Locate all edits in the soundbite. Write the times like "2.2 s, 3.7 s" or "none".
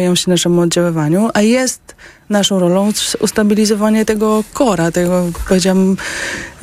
none